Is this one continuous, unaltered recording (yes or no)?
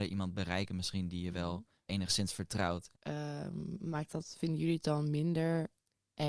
no